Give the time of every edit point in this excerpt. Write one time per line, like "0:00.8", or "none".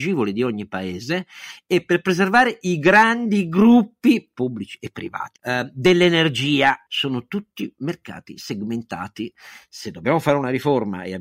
0:05.4
0:06.9